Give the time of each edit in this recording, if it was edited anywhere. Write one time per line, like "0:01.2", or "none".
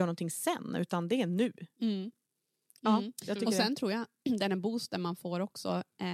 none